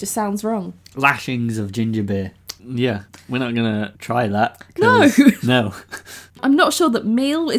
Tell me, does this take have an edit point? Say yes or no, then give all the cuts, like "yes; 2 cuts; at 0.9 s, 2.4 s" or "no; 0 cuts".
yes; 1 cut; at 2.6 s